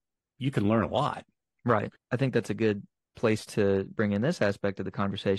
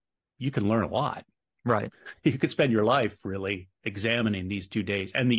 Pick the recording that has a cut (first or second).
first